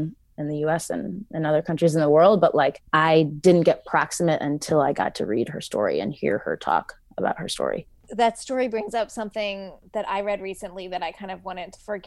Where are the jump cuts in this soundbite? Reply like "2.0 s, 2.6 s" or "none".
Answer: none